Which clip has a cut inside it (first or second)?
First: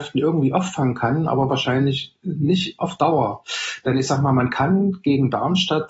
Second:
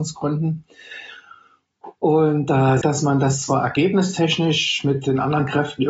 second